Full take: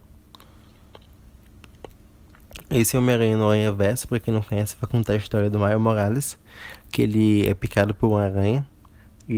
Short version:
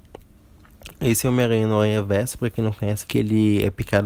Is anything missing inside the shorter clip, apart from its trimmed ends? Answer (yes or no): yes